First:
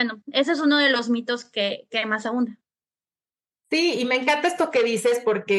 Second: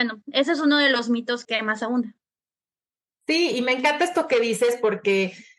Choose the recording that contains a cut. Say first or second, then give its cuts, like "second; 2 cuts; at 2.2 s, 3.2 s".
second; 1 cut; at 1.4 s